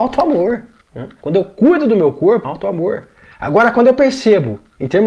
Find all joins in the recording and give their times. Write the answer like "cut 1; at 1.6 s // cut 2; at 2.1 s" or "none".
cut 1; at 1.2 s // cut 2; at 2.4 s